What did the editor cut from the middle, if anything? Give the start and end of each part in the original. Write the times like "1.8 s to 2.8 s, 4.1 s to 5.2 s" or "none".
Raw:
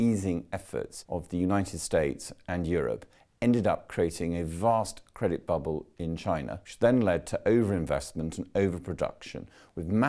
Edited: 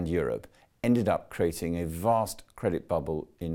none